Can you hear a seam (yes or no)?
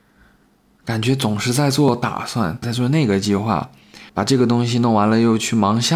yes